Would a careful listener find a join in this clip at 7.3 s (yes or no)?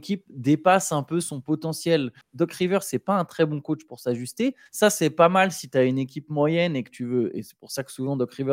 no